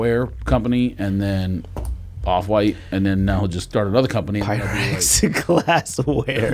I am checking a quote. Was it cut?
no; 0 cuts

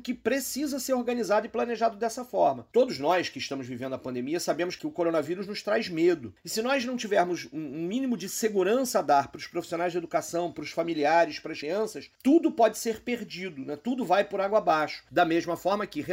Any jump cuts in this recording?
yes; 2 cuts; at 11.6 s, 15.1 s

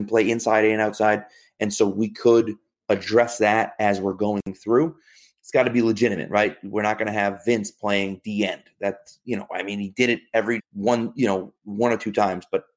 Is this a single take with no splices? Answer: no; 1 cut; at 10.6 s

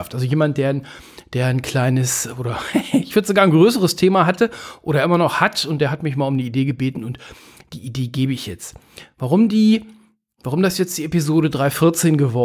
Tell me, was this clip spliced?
no; 0 cuts

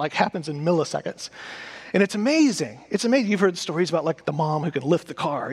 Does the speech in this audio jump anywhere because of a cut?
no; 0 cuts

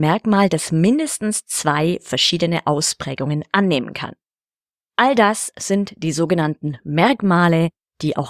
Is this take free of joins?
no; 1 cut; at 4.8 s

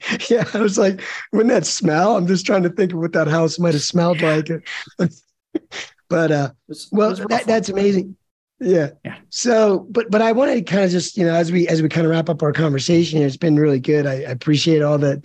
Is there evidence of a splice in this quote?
no; 0 cuts

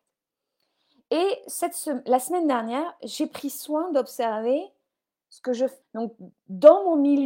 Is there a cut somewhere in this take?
yes; 1 cut; at 5.8 s

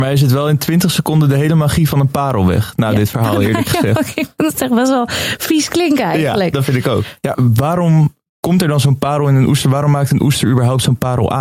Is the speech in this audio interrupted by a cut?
yes; 1 cut; at 7.3 s

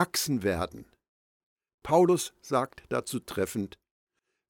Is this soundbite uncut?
no; 1 cut; at 1.7 s

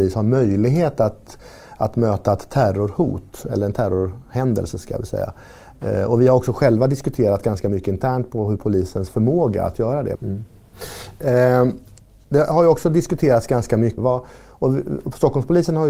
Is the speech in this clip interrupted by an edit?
yes; 2 cuts; at 10.1 s, 14.0 s

